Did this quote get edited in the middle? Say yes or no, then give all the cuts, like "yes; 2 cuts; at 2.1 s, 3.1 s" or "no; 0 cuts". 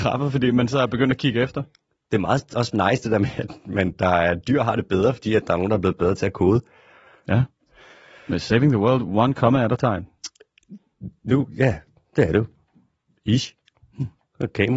no; 0 cuts